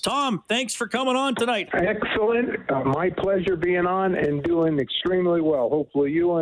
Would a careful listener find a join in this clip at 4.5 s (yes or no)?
no